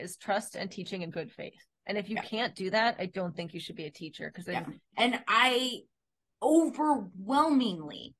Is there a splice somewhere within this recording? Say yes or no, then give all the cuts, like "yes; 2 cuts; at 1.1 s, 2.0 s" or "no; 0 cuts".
yes; 1 cut; at 4.9 s